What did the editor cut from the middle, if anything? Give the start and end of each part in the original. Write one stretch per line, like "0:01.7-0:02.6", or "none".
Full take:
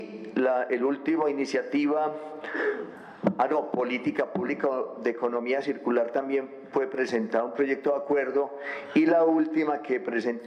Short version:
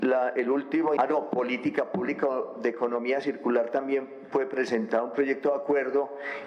0:01.3-0:03.4